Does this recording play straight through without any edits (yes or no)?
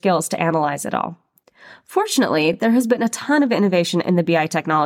yes